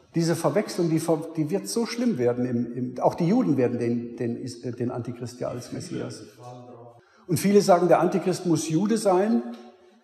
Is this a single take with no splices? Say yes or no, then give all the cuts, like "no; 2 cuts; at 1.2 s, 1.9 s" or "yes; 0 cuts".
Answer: yes; 0 cuts